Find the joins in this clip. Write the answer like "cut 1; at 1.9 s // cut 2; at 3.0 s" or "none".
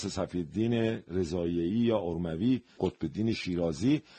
cut 1; at 2.8 s

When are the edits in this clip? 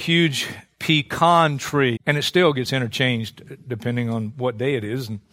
cut 1; at 2.0 s

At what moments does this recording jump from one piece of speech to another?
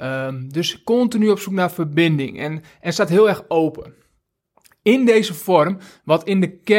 none

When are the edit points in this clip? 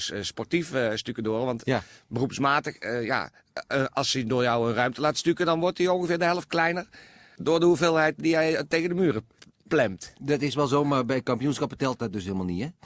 cut 1; at 8.2 s

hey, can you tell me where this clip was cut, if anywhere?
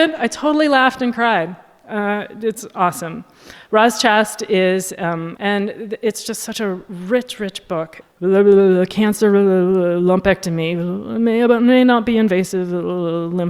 cut 1; at 5.4 s // cut 2; at 8.0 s

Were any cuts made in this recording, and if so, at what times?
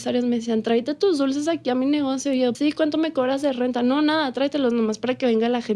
cut 1; at 2.5 s

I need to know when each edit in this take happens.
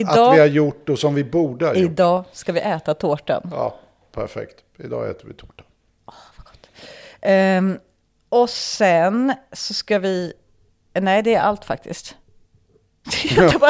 none

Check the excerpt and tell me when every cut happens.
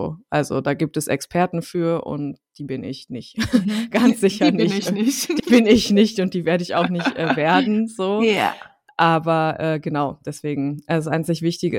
none

